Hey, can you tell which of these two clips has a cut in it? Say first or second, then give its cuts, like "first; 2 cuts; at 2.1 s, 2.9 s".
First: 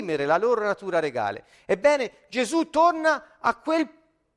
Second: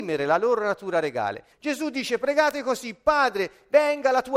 second; 1 cut; at 1.5 s